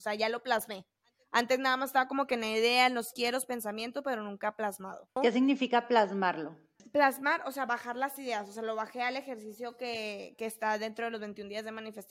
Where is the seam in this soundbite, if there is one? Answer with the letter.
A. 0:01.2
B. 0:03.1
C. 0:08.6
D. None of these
B